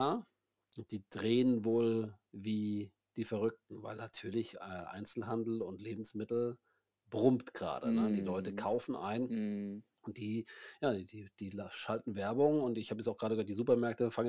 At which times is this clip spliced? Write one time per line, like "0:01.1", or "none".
none